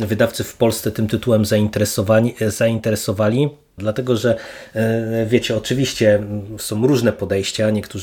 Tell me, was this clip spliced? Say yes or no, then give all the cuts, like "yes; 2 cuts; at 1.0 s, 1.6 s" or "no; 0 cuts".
yes; 1 cut; at 3.8 s